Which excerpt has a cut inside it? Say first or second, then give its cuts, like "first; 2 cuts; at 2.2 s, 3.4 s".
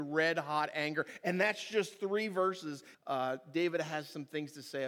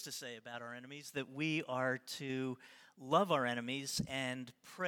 first; 1 cut; at 2.9 s